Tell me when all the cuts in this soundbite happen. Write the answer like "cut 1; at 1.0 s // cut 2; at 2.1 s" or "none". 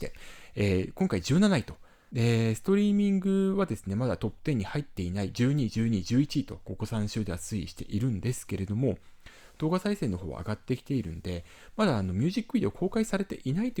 cut 1; at 2.1 s

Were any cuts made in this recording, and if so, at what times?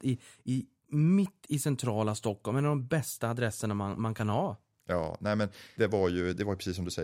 cut 1; at 5.8 s

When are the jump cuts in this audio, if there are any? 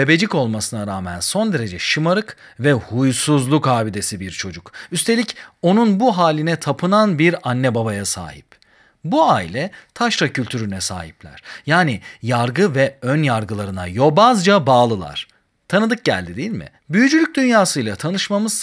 cut 1; at 16.8 s

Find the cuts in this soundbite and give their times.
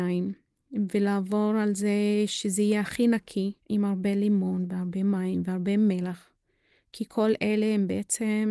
cut 1; at 3.6 s

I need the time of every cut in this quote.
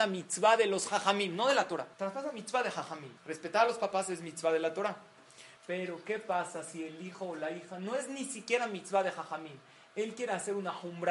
cut 1; at 1.9 s // cut 2; at 3.2 s // cut 3; at 5.6 s

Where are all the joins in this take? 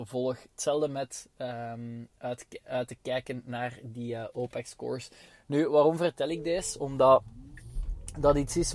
none

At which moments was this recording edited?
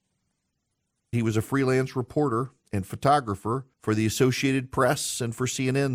cut 1; at 1.1 s // cut 2; at 3.7 s

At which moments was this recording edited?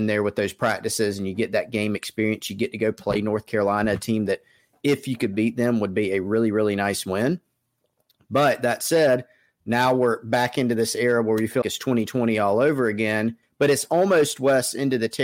cut 1; at 11.6 s // cut 2; at 13.4 s

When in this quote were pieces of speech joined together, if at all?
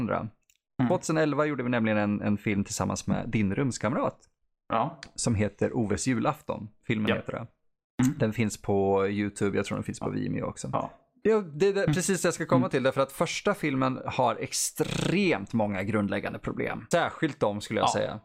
cut 1; at 11.2 s // cut 2; at 16.9 s

